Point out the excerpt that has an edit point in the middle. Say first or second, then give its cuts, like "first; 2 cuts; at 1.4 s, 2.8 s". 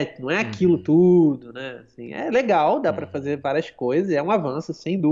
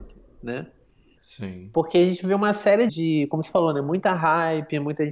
second; 2 cuts; at 1.2 s, 2.9 s